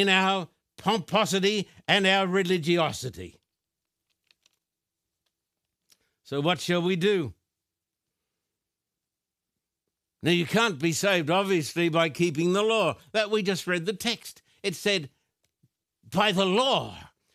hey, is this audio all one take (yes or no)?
yes